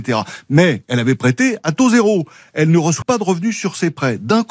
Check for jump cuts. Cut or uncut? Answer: cut